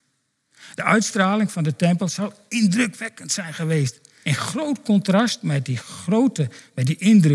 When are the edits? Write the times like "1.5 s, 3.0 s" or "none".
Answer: 4.2 s